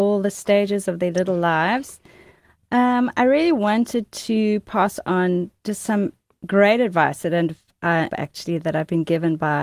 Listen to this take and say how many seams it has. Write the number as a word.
one